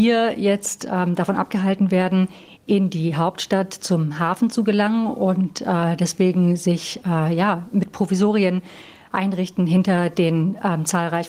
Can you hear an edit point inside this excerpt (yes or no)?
no